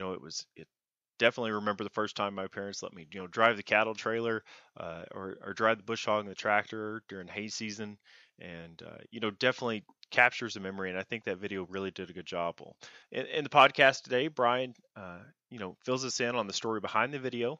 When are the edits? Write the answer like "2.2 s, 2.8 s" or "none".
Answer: none